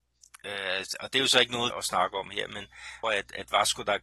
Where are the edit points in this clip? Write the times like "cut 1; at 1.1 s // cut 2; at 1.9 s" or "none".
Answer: cut 1; at 1.7 s // cut 2; at 3.0 s

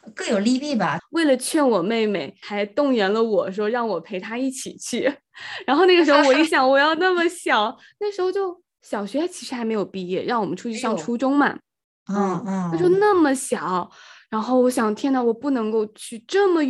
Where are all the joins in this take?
cut 1; at 1.0 s

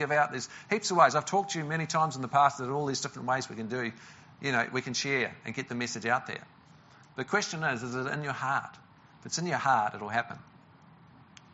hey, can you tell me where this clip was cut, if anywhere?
none

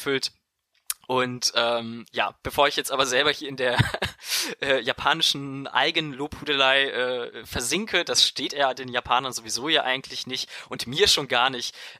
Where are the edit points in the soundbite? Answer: none

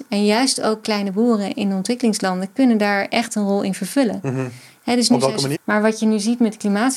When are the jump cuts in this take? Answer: cut 1; at 5.5 s

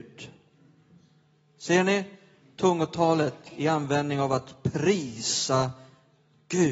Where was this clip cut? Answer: none

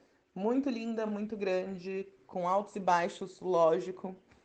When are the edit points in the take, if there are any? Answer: none

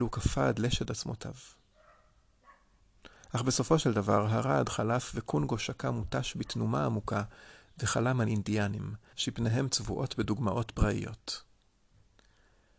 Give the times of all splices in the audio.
cut 1; at 9.1 s

